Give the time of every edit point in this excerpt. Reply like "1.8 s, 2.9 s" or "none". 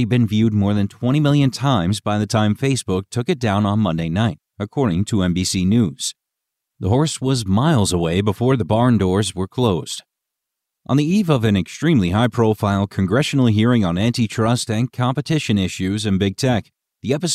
none

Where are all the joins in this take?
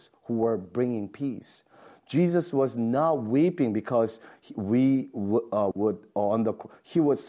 5.7 s

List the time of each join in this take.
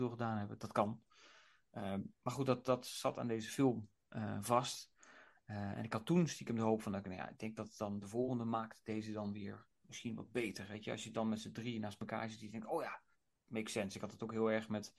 none

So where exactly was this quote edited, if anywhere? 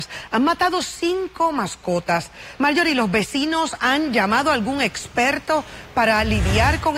2.6 s

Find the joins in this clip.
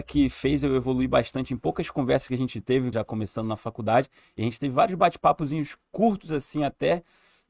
2.9 s

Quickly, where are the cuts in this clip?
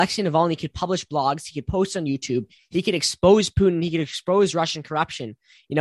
2.6 s

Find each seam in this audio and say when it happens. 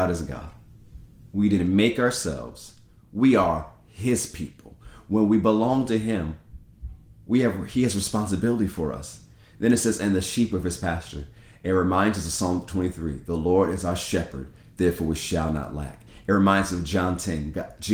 1.3 s

